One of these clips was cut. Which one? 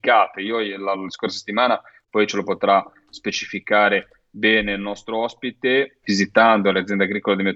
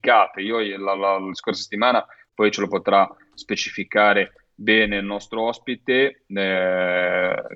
first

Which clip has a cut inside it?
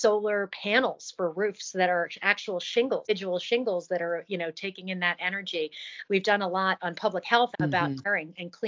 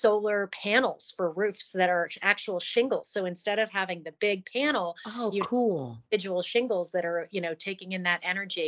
first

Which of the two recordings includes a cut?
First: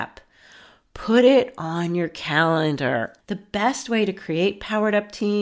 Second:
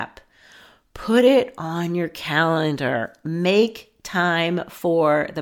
first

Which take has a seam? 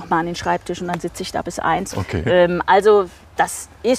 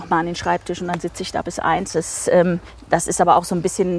first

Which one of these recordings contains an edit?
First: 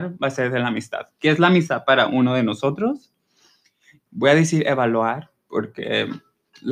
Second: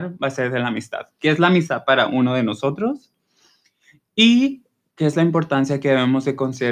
first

